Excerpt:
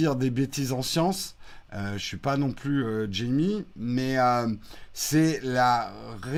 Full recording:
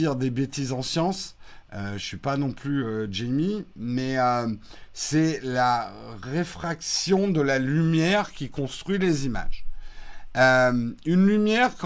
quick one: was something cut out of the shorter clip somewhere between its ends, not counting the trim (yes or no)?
no